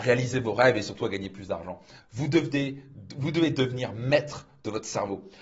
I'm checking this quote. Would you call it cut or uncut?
cut